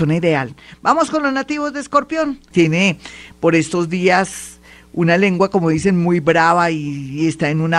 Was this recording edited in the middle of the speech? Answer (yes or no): yes